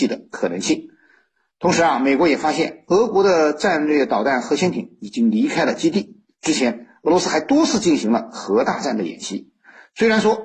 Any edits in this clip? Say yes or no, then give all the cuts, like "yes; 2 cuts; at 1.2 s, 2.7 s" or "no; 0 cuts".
no; 0 cuts